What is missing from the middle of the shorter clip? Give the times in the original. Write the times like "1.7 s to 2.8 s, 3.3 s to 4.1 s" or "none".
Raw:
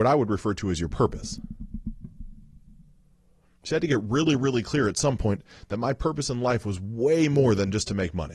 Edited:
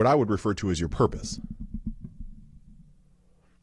none